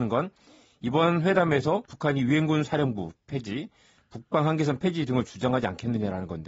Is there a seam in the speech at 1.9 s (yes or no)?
yes